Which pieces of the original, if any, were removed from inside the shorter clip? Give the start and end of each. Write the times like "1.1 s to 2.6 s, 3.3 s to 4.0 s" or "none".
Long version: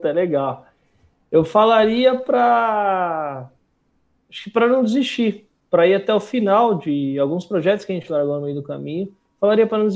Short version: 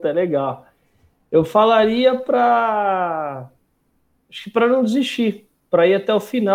none